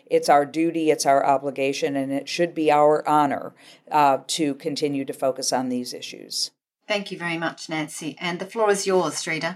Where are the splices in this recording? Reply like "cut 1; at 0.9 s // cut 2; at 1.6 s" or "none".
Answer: none